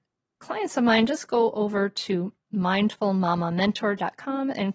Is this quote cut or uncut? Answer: uncut